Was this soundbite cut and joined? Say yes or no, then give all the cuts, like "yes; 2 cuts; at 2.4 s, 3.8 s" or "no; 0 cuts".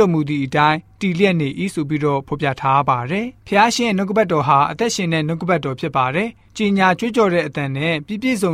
yes; 1 cut; at 3.4 s